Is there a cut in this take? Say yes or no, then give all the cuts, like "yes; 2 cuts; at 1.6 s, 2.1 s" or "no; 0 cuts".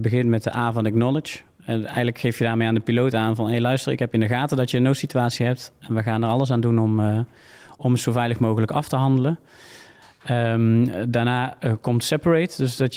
no; 0 cuts